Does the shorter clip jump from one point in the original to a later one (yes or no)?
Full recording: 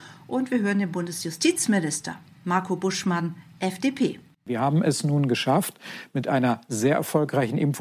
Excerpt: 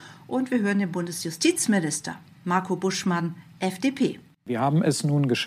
no